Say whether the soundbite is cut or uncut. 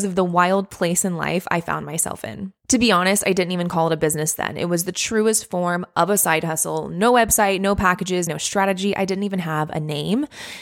cut